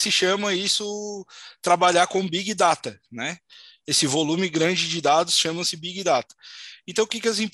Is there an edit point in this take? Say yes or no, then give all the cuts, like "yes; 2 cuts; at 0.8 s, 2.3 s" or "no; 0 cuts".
no; 0 cuts